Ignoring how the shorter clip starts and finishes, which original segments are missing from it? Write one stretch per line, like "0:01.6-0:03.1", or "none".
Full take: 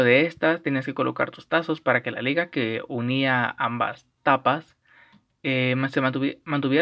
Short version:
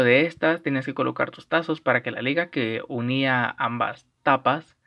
none